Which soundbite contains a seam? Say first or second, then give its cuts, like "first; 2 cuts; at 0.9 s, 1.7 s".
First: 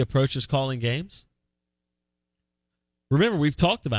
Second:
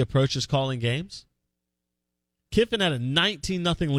second; 1 cut; at 2.5 s